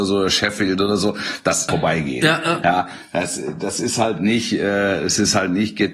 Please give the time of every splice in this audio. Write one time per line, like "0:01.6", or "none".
0:01.7